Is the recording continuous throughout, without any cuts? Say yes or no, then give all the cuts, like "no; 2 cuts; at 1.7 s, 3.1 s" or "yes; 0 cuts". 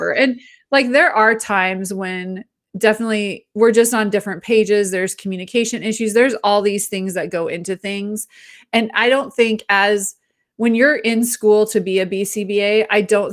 yes; 0 cuts